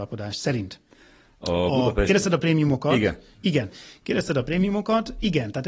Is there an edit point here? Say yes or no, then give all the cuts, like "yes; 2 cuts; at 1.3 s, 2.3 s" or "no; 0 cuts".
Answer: no; 0 cuts